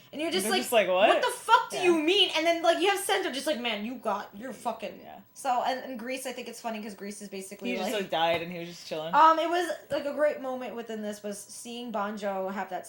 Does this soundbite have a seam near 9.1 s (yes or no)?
no